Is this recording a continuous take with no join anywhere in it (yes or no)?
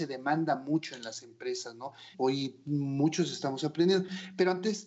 no